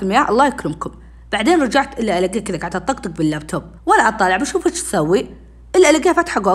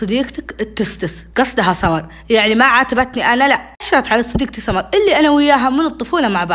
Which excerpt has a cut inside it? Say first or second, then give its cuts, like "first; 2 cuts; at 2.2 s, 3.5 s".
first; 1 cut; at 3.8 s